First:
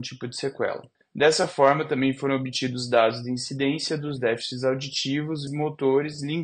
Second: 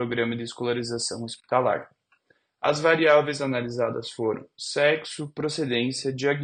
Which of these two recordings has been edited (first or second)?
first